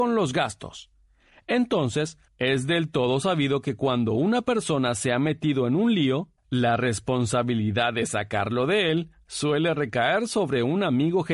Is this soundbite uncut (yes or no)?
no